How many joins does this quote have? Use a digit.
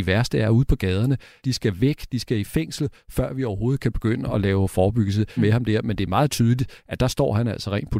2